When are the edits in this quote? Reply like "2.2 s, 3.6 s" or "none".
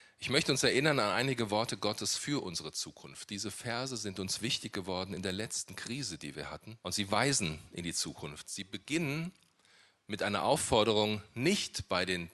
6.8 s